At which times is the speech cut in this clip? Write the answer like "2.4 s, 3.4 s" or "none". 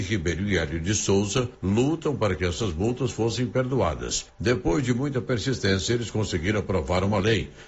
none